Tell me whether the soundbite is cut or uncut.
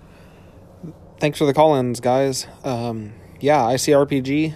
uncut